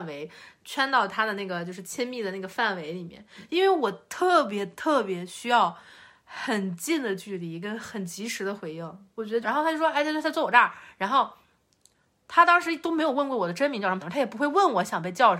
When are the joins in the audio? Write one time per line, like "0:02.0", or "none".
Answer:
0:09.4
0:14.0